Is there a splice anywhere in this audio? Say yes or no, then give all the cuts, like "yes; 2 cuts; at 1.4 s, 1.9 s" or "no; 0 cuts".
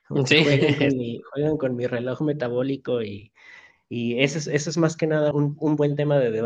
yes; 1 cut; at 5.3 s